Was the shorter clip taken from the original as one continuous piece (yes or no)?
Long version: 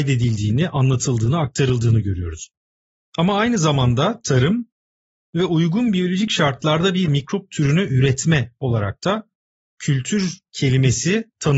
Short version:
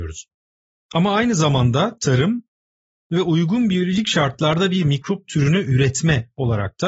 yes